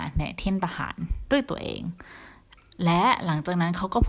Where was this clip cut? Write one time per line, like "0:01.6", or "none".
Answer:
none